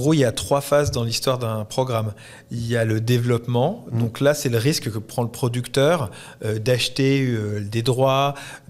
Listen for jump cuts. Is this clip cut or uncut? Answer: uncut